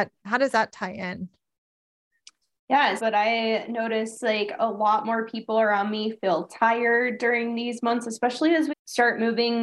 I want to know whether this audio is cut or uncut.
cut